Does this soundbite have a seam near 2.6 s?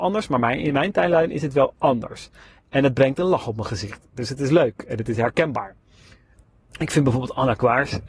no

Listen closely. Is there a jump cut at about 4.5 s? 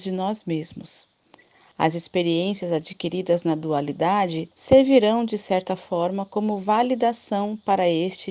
yes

